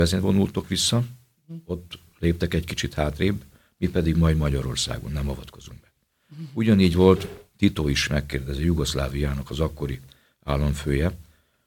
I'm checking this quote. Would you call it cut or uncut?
uncut